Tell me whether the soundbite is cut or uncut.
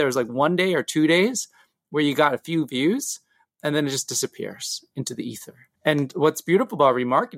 cut